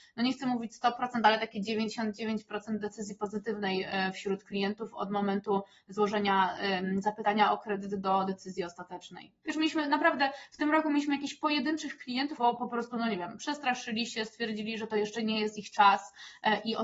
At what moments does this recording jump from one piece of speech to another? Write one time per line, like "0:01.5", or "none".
0:09.4
0:12.4

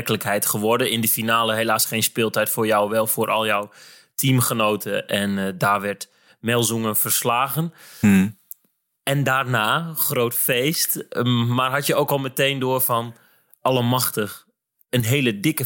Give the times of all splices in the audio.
none

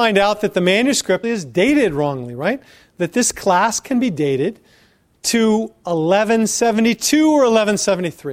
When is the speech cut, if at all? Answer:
0:01.2

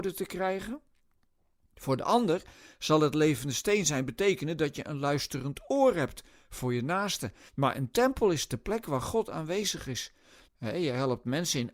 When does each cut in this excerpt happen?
0:07.5
0:10.5

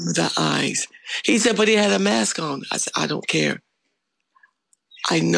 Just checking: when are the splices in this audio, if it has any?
none

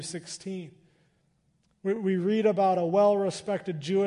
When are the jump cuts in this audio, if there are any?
none

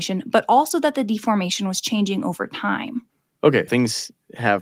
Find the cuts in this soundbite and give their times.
0:03.7

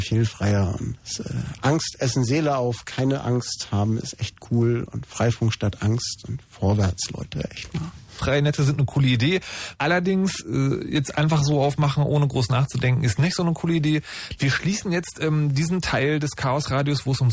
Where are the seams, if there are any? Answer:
0:08.2
0:09.8
0:14.4

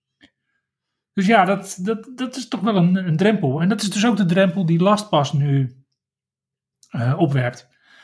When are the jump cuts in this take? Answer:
none

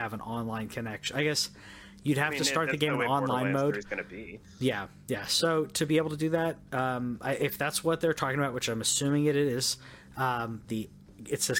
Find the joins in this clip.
0:10.7

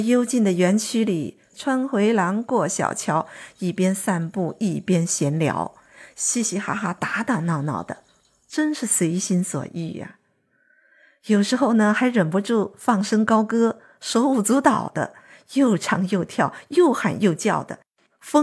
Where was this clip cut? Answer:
none

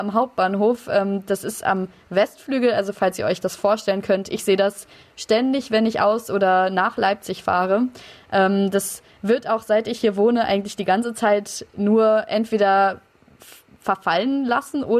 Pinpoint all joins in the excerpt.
none

